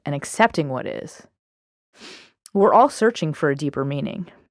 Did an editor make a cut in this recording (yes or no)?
no